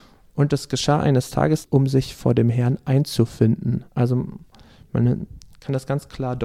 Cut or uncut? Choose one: cut